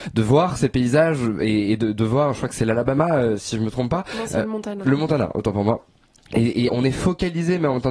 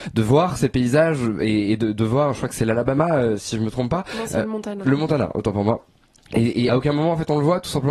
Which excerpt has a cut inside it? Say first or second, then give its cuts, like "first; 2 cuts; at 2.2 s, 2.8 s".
first; 1 cut; at 6.7 s